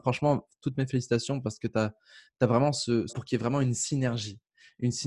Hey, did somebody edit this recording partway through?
yes; 1 cut; at 3.1 s

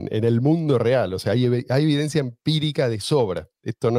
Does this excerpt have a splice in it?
no; 0 cuts

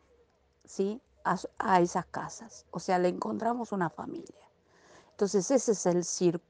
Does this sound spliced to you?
no; 0 cuts

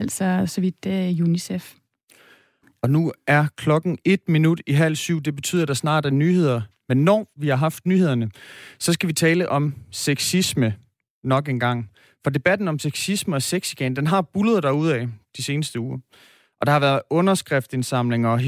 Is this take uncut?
yes; 0 cuts

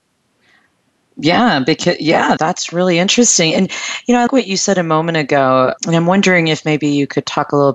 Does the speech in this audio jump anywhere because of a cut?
yes; 3 cuts; at 2.4 s, 4.3 s, 5.8 s

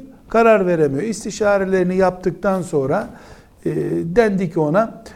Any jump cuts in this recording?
no; 0 cuts

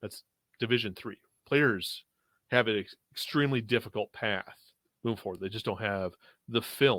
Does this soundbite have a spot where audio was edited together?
no; 0 cuts

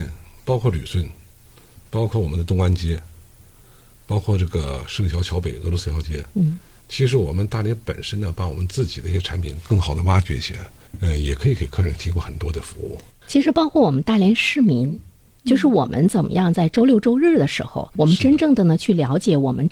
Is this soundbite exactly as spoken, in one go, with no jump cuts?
yes; 0 cuts

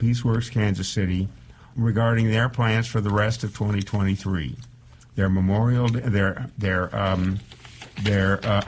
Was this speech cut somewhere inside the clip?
yes; 1 cut; at 1.7 s

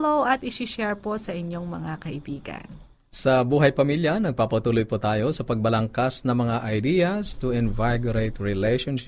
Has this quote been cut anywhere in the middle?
no; 0 cuts

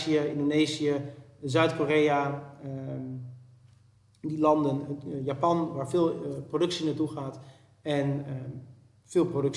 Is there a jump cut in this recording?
no; 0 cuts

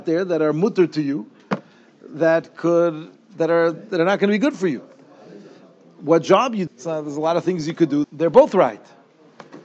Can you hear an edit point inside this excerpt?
yes; 2 cuts; at 6.7 s, 8.0 s

